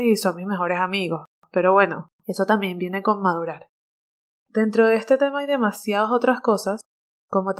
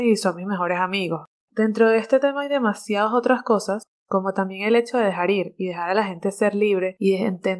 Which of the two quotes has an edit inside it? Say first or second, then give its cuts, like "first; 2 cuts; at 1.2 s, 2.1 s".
second; 2 cuts; at 1.4 s, 3.9 s